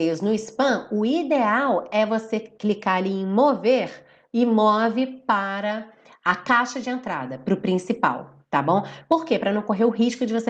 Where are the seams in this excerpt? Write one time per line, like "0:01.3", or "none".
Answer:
none